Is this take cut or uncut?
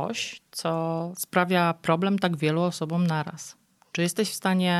uncut